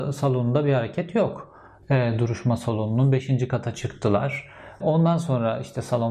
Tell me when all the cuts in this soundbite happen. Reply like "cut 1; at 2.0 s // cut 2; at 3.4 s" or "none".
cut 1; at 1.8 s // cut 2; at 4.8 s